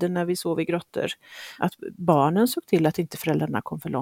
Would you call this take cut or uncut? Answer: cut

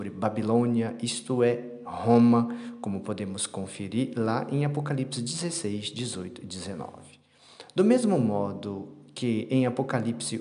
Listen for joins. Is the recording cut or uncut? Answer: uncut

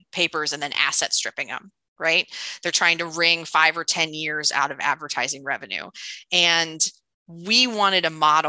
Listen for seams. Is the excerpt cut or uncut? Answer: uncut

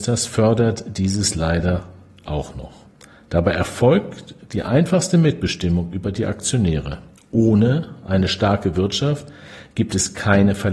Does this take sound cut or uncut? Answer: cut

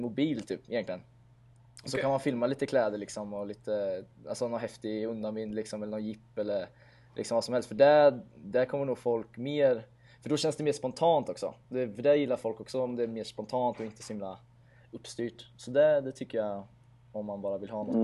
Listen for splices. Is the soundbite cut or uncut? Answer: uncut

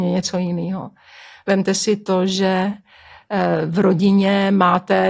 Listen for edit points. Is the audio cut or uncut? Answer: uncut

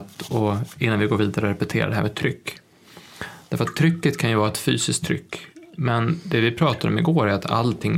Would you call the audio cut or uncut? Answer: uncut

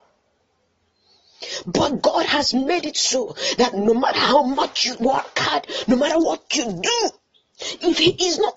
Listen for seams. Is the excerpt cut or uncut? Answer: cut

